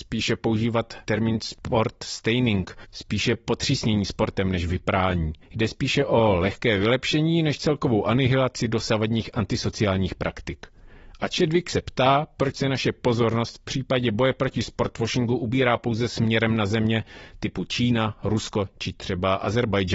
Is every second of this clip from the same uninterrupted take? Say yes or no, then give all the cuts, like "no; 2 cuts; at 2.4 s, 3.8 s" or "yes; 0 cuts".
yes; 0 cuts